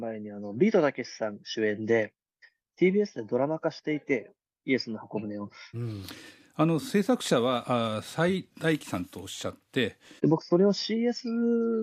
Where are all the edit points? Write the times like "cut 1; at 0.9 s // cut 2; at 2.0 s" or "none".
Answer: cut 1; at 5.7 s // cut 2; at 10.2 s